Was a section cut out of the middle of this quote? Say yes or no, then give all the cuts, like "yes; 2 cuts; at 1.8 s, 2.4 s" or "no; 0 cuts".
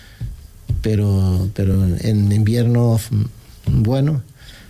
no; 0 cuts